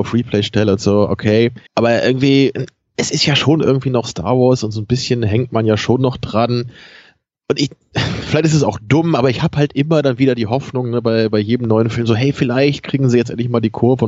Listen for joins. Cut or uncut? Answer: cut